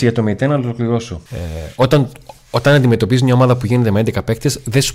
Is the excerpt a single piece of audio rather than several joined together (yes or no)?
no